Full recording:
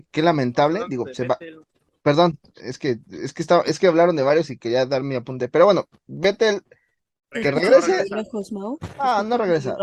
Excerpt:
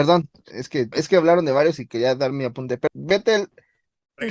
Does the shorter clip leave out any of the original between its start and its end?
yes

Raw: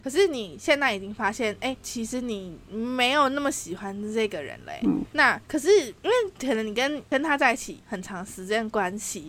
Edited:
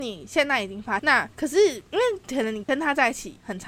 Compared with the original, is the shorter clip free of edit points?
no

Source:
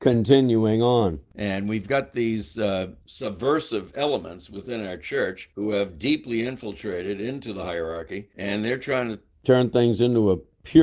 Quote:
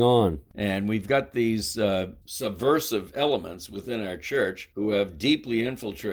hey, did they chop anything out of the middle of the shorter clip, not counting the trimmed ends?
no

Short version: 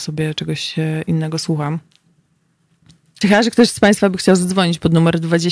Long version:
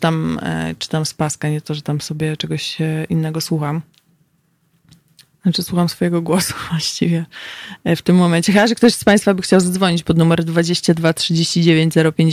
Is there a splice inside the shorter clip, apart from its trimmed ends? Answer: yes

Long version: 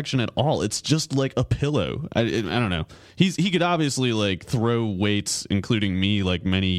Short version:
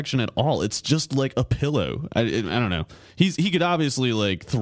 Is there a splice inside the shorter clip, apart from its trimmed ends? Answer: no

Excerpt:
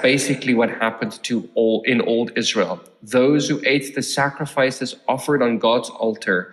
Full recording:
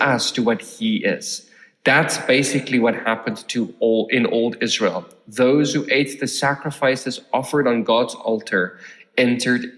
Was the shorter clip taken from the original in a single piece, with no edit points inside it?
yes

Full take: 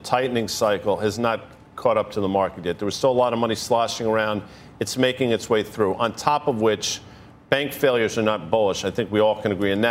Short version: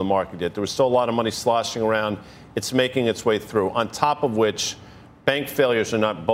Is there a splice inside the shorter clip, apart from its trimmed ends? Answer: no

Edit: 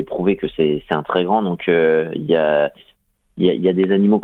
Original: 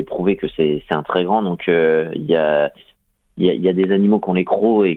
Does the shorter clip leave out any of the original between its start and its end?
no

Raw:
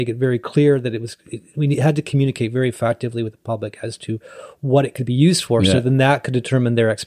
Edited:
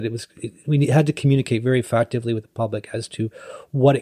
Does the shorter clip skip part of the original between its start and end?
no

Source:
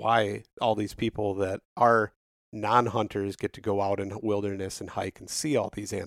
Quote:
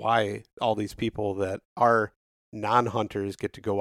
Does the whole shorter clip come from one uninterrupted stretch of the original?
yes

